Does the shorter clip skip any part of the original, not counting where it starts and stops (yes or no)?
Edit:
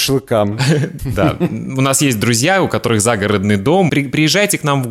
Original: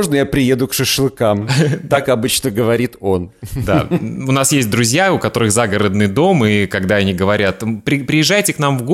yes